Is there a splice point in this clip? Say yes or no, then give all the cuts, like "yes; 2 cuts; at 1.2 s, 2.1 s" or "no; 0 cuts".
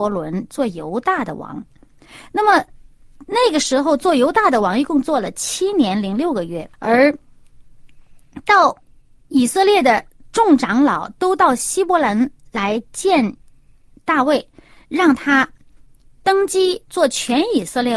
yes; 1 cut; at 6.7 s